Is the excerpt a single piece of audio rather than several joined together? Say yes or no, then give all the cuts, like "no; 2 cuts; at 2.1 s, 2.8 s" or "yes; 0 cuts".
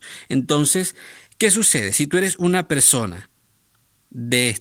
yes; 0 cuts